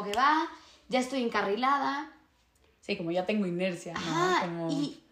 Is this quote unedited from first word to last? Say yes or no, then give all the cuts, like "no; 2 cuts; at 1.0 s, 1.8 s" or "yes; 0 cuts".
yes; 0 cuts